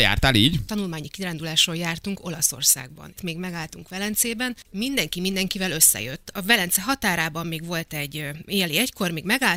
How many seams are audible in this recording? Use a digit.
2